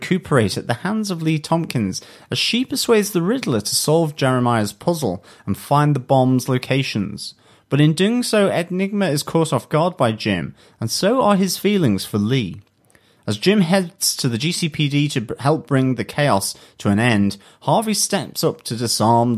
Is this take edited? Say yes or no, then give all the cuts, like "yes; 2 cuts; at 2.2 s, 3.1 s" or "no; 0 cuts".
no; 0 cuts